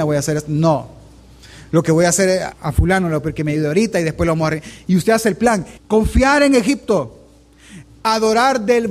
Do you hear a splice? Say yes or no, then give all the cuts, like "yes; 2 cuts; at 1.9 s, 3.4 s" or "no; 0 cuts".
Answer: yes; 2 cuts; at 2.5 s, 5.8 s